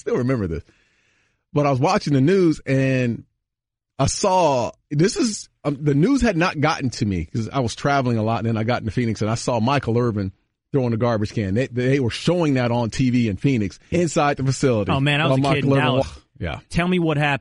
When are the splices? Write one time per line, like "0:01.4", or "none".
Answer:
0:13.9
0:16.0